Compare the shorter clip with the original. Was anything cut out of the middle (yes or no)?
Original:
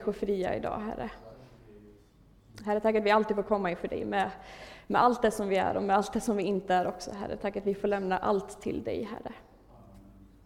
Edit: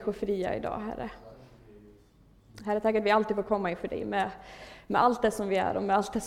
no